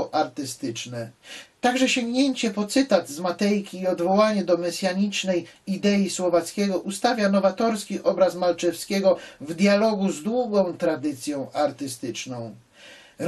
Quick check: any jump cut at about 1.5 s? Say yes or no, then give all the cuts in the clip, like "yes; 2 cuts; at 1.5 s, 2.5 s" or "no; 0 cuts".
yes; 1 cut; at 1.5 s